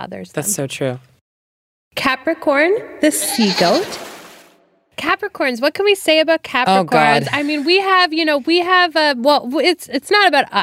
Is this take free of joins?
yes; 0 cuts

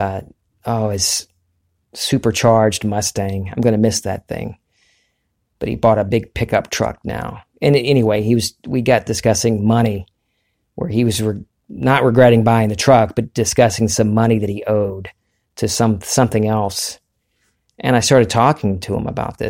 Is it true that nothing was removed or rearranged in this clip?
yes; 0 cuts

